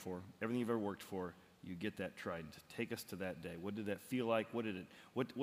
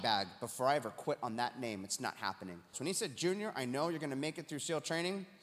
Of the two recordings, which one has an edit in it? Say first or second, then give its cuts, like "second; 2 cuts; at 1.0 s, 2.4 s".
second; 1 cut; at 2.7 s